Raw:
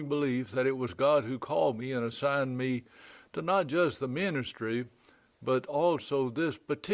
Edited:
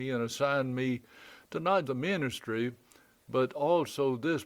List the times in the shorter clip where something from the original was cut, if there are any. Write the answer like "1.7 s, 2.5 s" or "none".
1.9 s